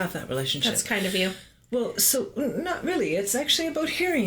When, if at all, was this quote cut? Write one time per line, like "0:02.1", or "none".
none